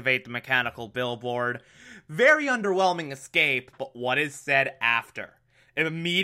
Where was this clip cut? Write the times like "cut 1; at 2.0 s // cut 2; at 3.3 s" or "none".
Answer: cut 1; at 3.8 s